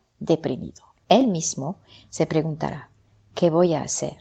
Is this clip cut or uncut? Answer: cut